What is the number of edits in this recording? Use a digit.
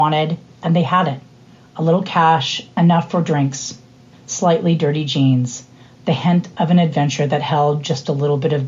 1